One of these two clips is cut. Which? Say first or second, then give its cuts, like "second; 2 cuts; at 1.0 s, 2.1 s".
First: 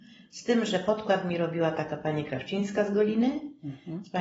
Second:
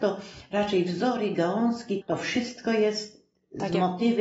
second; 1 cut; at 2.0 s